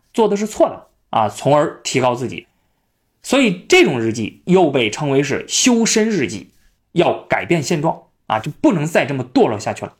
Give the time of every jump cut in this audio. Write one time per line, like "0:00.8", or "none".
0:06.8